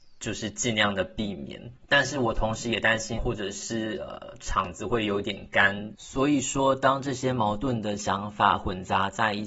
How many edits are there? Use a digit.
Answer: 3